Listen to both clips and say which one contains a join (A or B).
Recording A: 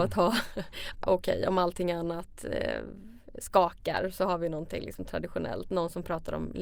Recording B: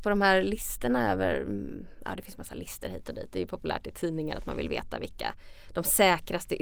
A